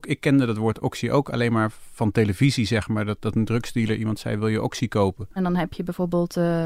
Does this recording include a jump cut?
yes; 2 cuts; at 3.2 s, 5.4 s

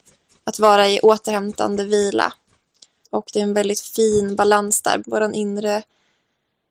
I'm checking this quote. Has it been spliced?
yes; 2 cuts; at 3.0 s, 5.0 s

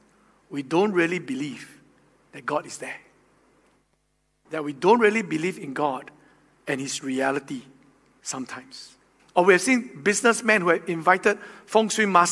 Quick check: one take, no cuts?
no; 2 cuts; at 4.4 s, 9.2 s

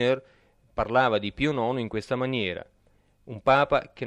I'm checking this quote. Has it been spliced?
no; 0 cuts

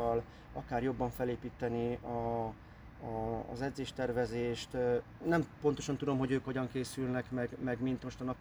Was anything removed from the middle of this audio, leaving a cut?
no; 0 cuts

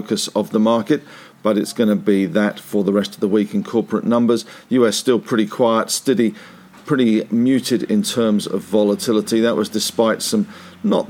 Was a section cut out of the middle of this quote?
no; 0 cuts

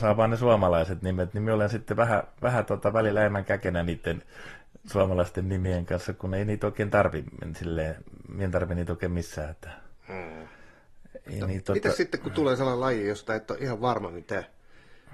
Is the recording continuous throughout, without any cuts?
yes; 0 cuts

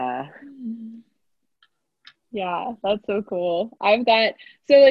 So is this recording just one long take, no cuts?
yes; 0 cuts

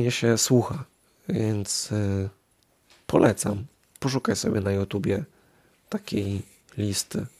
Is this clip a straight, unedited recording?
yes; 0 cuts

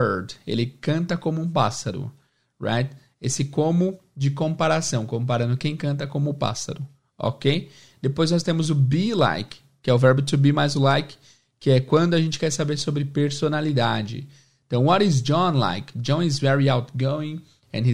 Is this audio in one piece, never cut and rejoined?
yes; 0 cuts

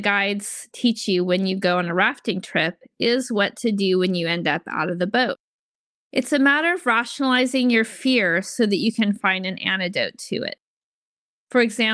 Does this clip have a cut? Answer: no; 0 cuts

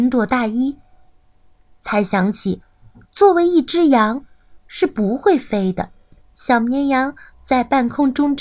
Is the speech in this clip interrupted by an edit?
yes; 1 cut; at 6.2 s

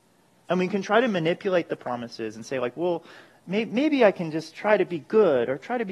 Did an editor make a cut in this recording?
no; 0 cuts

